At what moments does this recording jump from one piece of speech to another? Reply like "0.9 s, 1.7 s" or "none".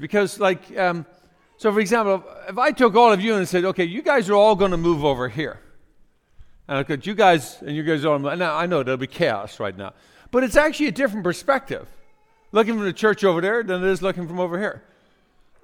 none